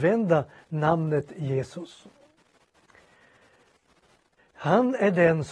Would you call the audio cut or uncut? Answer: cut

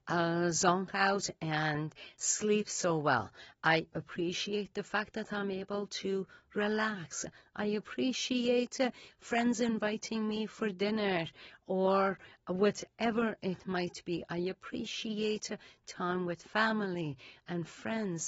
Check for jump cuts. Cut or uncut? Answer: uncut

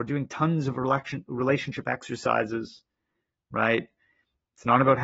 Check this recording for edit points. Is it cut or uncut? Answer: uncut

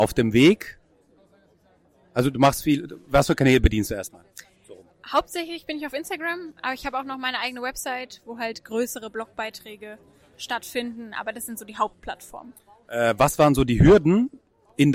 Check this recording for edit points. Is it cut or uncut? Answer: uncut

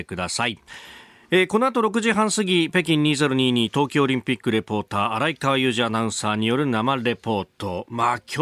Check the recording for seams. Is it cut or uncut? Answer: uncut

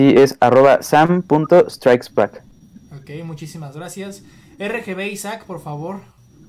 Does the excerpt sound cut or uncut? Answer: uncut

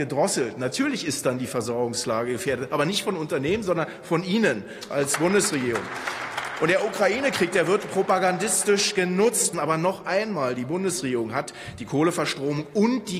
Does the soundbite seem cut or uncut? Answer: cut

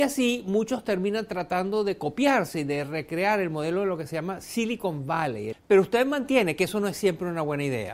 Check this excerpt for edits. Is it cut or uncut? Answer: uncut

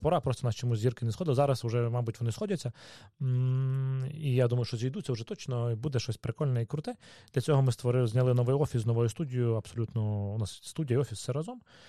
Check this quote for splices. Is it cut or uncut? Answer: uncut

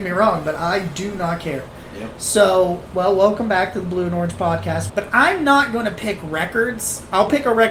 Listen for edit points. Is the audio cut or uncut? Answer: cut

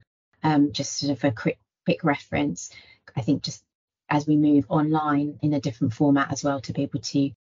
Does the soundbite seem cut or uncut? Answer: cut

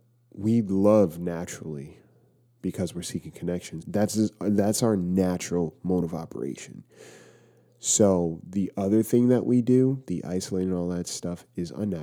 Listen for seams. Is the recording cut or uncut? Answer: cut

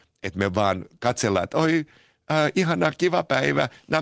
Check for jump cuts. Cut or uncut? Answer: uncut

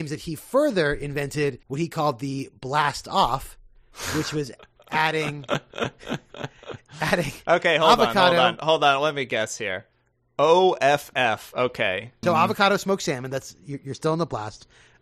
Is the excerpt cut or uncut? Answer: cut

